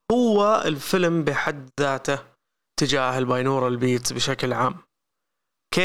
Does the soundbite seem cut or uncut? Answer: uncut